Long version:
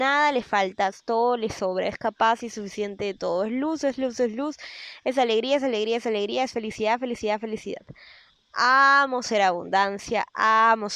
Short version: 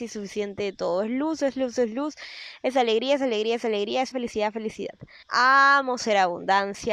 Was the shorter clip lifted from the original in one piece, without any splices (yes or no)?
no